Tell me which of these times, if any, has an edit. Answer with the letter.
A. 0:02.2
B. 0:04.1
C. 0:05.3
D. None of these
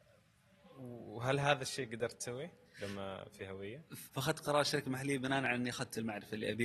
B